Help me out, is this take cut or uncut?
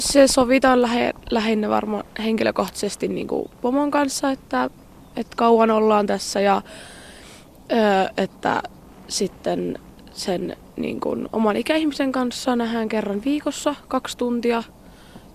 uncut